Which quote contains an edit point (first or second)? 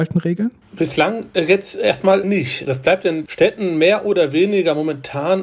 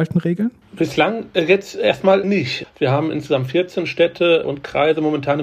second